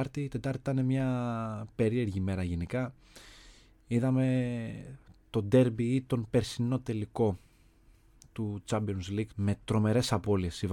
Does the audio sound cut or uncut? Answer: cut